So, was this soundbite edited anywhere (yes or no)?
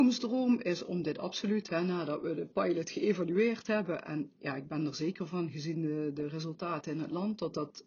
no